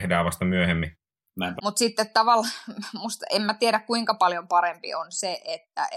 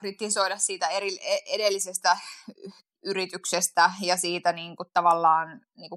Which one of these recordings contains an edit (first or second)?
first